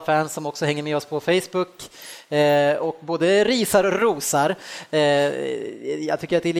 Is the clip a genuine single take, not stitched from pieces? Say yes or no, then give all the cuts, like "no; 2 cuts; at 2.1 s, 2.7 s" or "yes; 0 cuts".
yes; 0 cuts